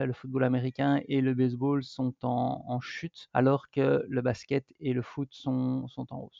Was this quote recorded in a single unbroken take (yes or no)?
yes